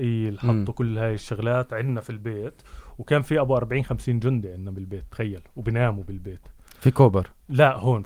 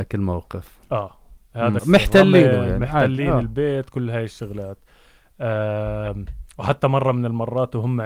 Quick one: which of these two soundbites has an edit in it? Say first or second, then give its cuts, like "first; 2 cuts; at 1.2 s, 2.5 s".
second; 1 cut; at 1.8 s